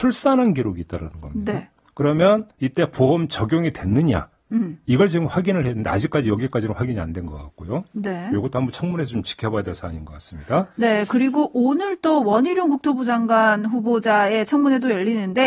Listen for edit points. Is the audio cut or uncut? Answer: uncut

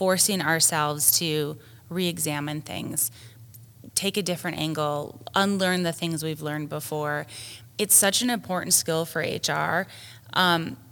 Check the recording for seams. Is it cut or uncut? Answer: uncut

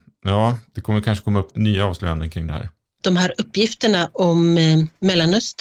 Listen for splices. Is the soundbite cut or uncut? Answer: cut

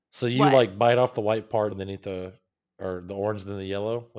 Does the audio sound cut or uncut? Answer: cut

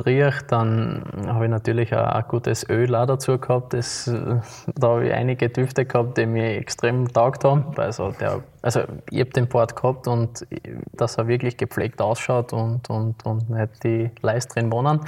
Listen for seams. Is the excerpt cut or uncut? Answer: cut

